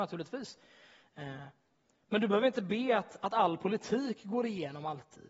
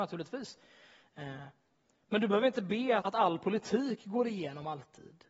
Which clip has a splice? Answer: second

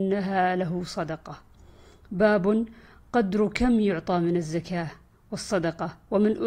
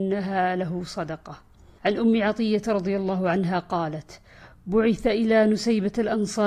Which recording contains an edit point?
second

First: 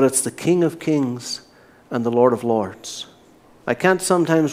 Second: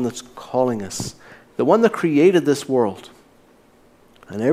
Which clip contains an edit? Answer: first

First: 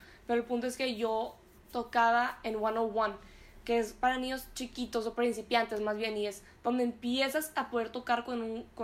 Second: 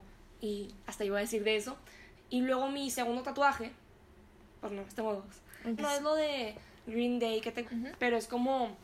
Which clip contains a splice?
second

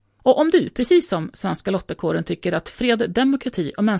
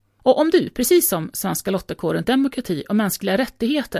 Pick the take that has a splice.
second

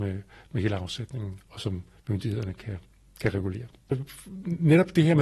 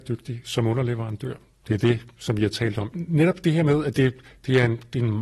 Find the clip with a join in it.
second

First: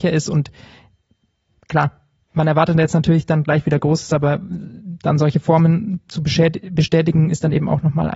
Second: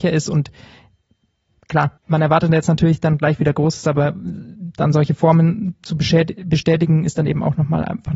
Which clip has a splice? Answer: second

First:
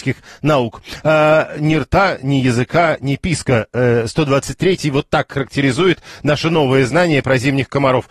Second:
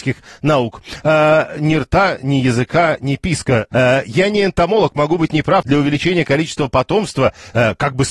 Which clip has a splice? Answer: second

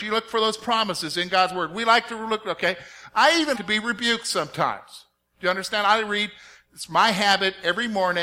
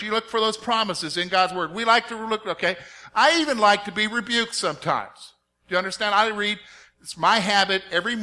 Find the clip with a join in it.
first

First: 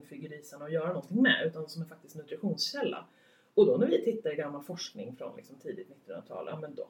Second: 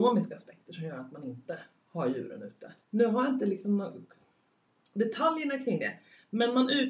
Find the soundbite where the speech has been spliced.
second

